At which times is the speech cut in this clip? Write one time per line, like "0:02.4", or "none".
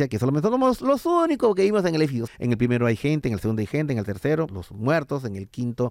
0:02.3
0:04.5